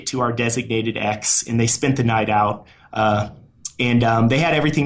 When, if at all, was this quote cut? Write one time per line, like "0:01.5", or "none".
none